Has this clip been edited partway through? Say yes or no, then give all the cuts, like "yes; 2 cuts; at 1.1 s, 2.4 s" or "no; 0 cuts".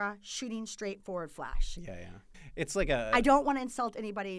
yes; 1 cut; at 2.3 s